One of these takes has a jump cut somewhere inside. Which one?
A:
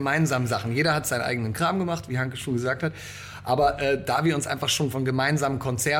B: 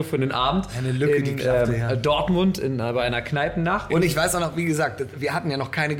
B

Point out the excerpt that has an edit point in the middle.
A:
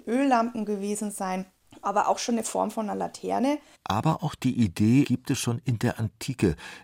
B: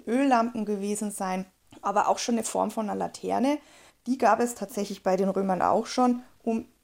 A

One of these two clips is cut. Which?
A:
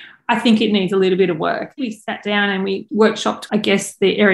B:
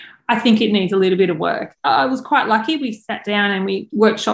A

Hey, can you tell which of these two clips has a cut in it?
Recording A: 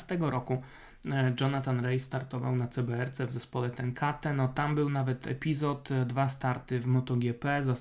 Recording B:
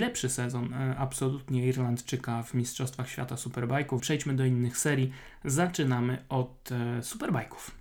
B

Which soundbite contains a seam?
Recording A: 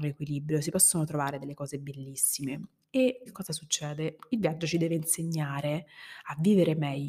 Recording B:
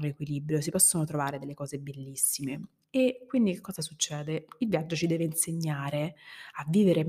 A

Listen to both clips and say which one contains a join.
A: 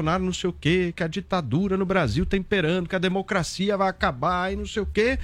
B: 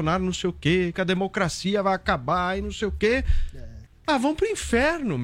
B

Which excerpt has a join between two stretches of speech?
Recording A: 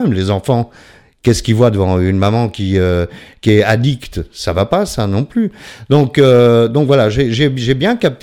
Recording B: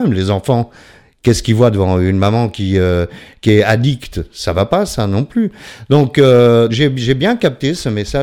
B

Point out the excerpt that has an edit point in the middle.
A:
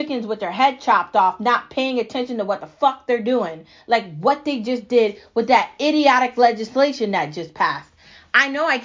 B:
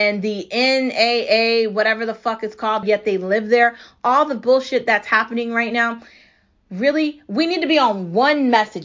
B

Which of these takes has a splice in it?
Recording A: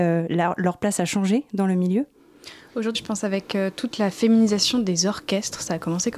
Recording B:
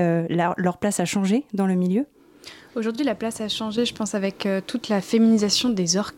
A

